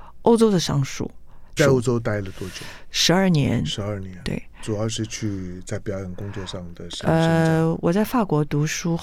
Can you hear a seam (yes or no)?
yes